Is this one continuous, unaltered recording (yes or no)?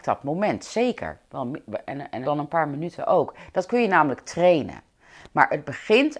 no